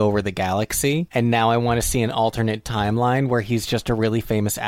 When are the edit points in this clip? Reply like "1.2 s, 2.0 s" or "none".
none